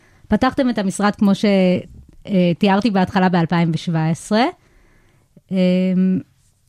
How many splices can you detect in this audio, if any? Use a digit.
0